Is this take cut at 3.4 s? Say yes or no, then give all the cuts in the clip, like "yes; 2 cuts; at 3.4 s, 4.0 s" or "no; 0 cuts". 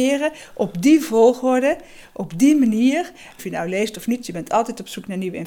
yes; 1 cut; at 3.4 s